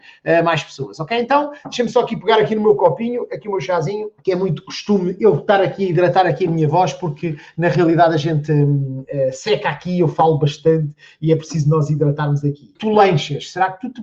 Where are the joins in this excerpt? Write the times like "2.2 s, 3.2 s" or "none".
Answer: 4.2 s, 12.7 s

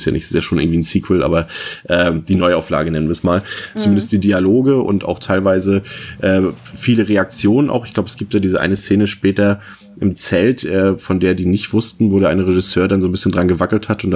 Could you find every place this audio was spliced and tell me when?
3.7 s

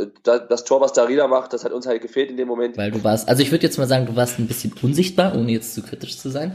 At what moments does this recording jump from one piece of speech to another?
2.7 s

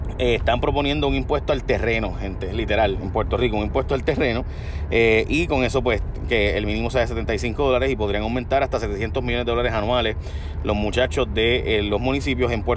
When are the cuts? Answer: none

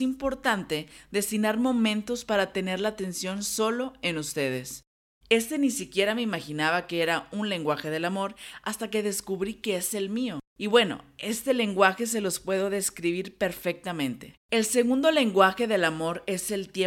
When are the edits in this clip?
5.2 s, 14.4 s

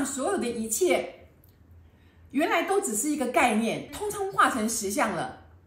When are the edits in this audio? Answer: 3.9 s

